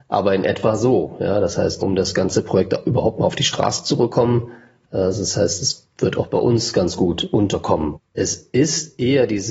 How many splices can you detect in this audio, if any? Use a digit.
2